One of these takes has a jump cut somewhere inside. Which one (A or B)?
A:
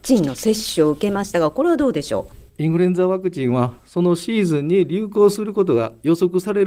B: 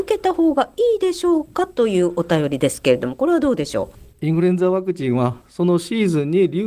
A